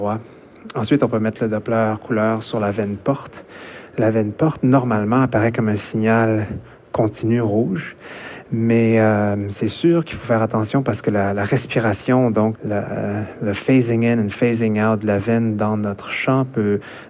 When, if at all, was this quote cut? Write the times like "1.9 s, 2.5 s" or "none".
12.5 s